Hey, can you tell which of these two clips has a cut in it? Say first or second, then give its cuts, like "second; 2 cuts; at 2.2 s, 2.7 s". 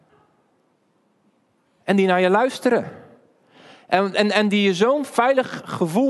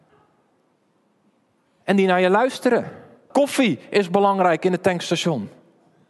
second; 1 cut; at 3.3 s